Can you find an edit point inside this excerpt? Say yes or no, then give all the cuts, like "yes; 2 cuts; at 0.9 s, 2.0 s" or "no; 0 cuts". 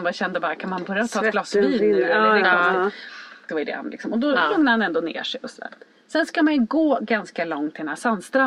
yes; 1 cut; at 3.5 s